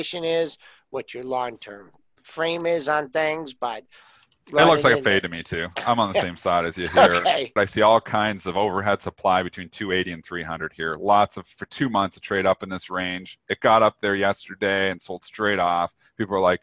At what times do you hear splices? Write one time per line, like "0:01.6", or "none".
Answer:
0:07.6